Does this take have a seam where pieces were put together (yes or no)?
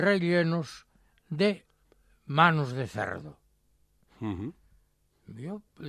no